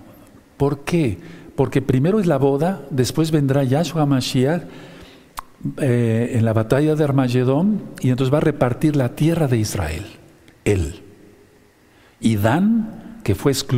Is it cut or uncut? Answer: uncut